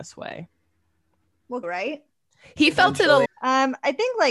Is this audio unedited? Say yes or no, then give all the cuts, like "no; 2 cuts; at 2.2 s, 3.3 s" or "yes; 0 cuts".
no; 2 cuts; at 1.6 s, 3.2 s